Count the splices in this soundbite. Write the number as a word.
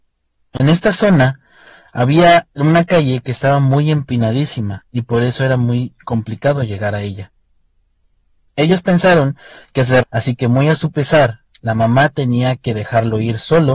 two